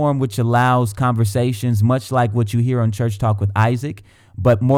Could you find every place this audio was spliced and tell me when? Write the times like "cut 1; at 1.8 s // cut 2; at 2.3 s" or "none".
none